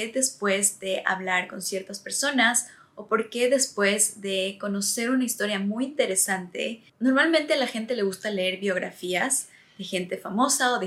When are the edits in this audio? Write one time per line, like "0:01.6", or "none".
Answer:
none